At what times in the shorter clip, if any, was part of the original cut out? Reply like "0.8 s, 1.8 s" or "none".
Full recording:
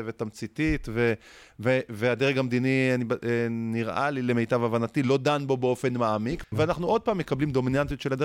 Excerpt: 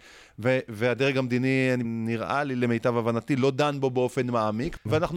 1.8 s